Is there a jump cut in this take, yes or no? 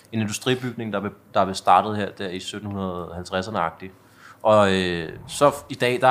no